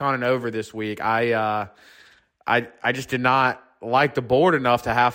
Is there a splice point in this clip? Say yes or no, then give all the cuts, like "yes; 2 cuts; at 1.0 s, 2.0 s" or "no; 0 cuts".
no; 0 cuts